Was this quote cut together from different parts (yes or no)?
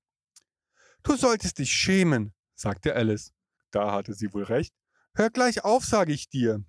yes